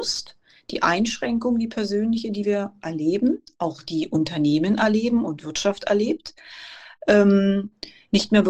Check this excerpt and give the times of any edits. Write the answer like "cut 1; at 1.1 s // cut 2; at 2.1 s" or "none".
none